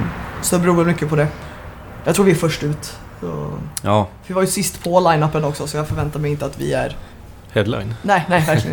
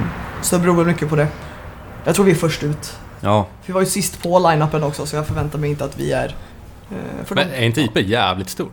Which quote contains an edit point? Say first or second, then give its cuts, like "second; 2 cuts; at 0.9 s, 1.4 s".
second; 2 cuts; at 3.2 s, 6.9 s